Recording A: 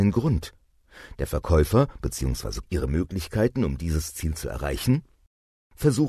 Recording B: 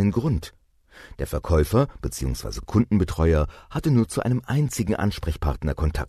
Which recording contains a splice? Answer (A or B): A